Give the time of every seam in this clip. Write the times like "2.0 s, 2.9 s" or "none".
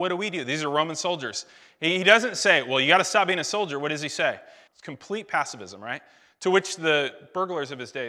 4.7 s

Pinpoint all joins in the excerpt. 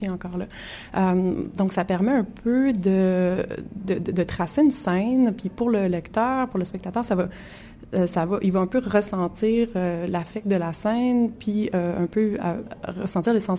none

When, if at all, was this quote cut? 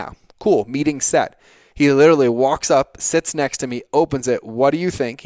none

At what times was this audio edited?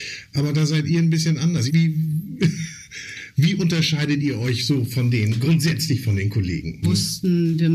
1.7 s, 6.8 s

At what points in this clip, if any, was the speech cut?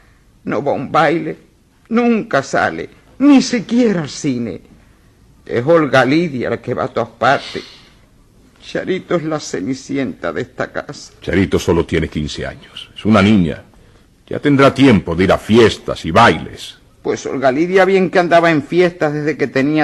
none

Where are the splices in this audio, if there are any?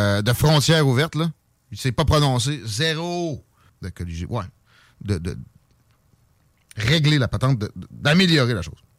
3.7 s

